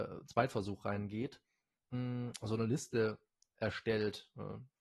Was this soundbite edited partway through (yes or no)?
no